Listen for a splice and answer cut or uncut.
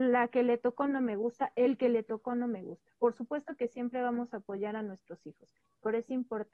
uncut